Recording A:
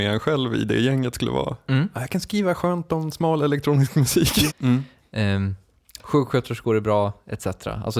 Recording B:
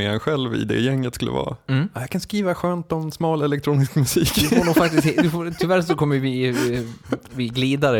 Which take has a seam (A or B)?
A